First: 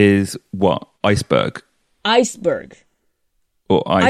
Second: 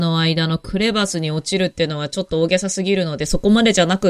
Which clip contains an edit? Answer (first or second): first